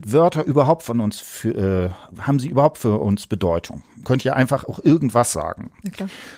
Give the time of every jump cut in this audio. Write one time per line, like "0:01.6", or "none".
none